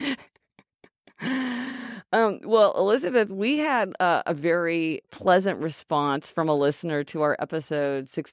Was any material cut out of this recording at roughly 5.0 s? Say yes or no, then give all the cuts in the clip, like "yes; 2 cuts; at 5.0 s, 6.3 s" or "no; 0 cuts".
yes; 1 cut; at 5.0 s